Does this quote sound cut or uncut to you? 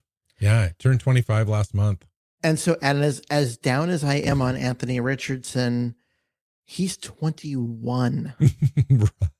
uncut